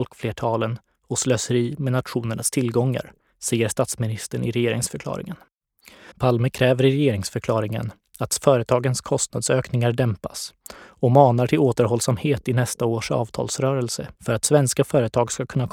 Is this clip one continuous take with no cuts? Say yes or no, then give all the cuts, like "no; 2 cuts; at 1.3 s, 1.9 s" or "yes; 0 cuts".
no; 2 cuts; at 6.1 s, 14.2 s